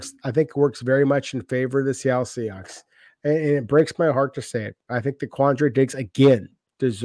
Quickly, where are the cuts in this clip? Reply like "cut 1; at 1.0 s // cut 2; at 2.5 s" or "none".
none